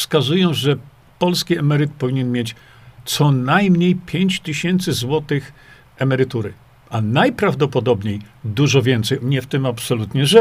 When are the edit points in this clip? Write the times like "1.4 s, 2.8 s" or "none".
9.2 s

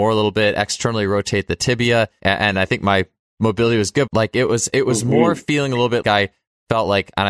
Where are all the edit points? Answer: 2.2 s, 4.1 s, 6.0 s

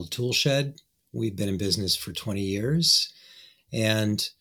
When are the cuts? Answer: none

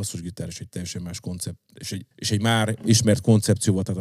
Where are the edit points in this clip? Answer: 2.1 s

